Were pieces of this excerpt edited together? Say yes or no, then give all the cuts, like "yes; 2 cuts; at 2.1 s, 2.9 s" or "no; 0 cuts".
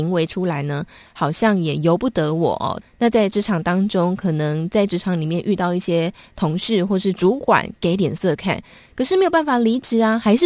yes; 1 cut; at 2.8 s